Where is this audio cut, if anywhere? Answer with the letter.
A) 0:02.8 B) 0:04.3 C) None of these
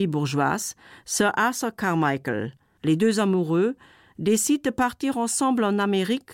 A